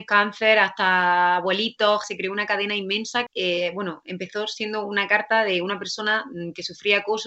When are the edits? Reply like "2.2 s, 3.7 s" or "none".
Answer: 2.0 s, 3.3 s